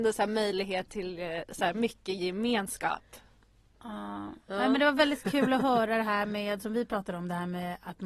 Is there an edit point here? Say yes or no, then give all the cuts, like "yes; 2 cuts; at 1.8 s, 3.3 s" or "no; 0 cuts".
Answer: no; 0 cuts